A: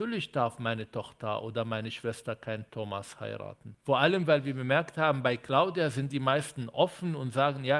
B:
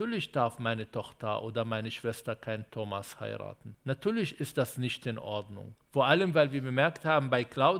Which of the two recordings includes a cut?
A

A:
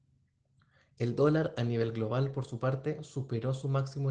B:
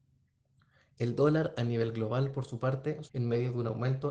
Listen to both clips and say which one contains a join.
B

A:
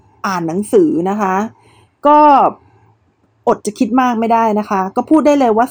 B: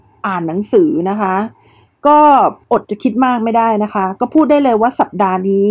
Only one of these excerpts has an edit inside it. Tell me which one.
B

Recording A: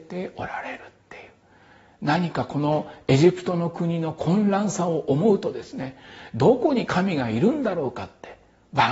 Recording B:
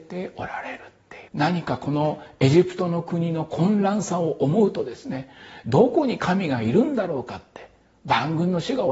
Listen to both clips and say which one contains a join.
B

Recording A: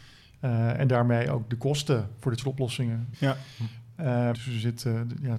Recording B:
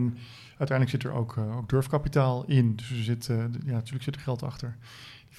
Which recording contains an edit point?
A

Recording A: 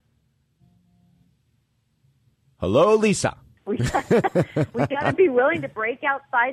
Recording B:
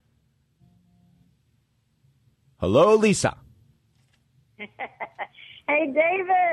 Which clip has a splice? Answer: A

